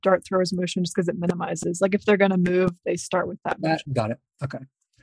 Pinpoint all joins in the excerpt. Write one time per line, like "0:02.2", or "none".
0:03.8